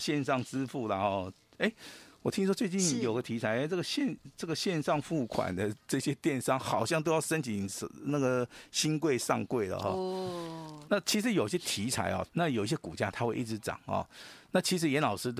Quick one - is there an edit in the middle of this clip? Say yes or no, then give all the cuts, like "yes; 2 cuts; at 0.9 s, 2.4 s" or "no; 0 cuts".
yes; 2 cuts; at 10.9 s, 12.3 s